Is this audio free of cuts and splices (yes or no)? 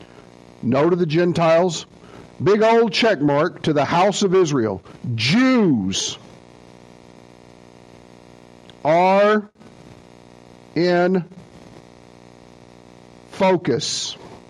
no